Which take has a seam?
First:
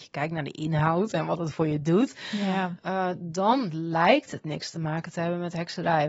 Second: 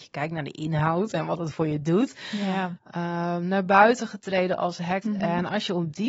second; 2 cuts; at 2.8 s, 5.0 s

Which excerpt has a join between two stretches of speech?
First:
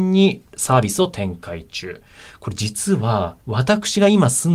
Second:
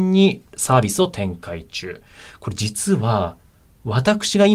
first; 1 cut; at 3.4 s

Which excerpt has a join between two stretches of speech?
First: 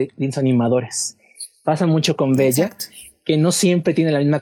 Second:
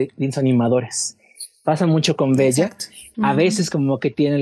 second; 1 cut; at 3.1 s

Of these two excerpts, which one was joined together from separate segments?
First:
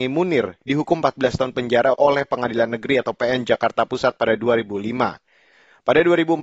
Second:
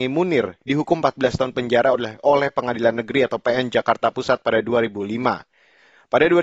first; 1 cut; at 1.9 s

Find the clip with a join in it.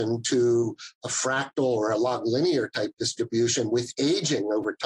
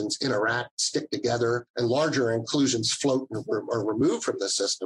second; 1 cut; at 1.7 s

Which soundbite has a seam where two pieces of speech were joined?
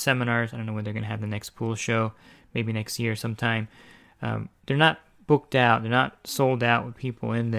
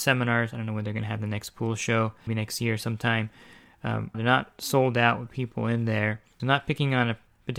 second; 3 cuts; at 2.3 s, 4.1 s, 6.4 s

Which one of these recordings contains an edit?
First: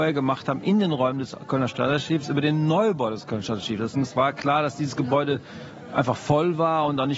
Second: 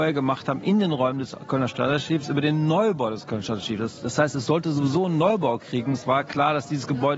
first; 1 cut; at 3.9 s

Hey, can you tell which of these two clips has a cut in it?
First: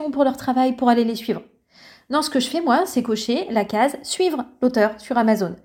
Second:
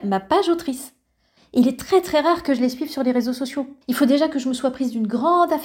second; 2 cuts; at 1.4 s, 3.8 s

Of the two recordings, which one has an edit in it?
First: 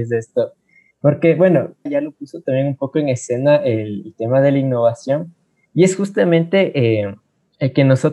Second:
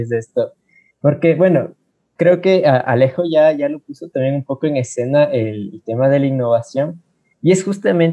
first; 1 cut; at 1.9 s

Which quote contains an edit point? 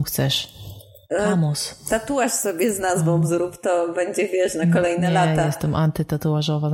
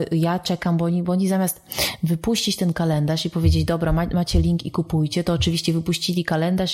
first; 1 cut; at 1.1 s

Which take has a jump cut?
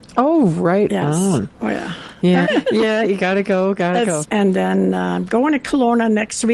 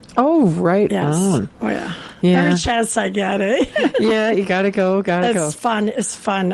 first; 2 cuts; at 2.4 s, 4.2 s

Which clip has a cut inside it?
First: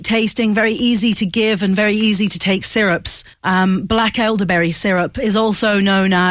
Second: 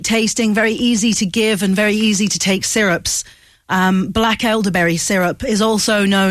first; 1 cut; at 3.3 s

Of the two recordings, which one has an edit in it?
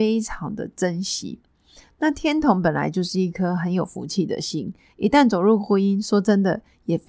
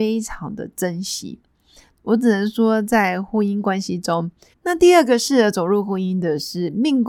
second; 2 cuts; at 1.9 s, 4.5 s

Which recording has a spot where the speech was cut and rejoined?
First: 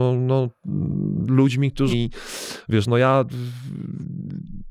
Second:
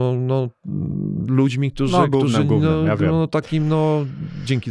first; 1 cut; at 1.9 s

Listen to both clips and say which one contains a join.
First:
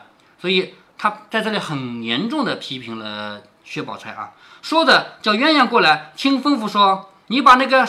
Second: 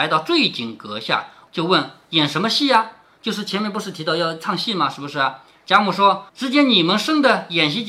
second; 2 cuts; at 1.5 s, 6.3 s

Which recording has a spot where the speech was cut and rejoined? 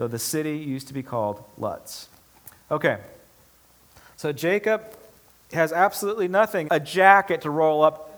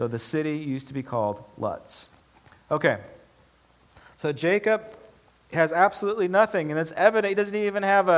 first; 1 cut; at 6.7 s

